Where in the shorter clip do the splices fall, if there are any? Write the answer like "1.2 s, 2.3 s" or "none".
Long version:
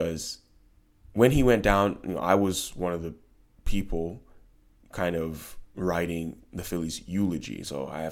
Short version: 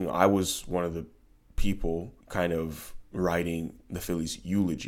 2.2 s

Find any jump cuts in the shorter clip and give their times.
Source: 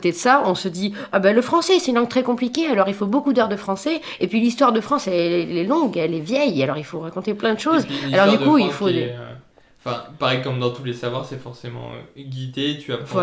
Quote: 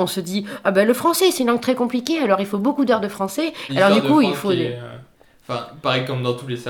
3.7 s

